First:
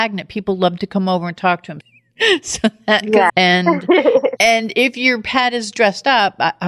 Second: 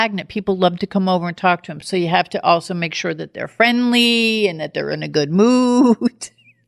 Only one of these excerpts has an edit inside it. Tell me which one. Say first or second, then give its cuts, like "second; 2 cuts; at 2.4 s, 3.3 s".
first; 2 cuts; at 1.8 s, 3.3 s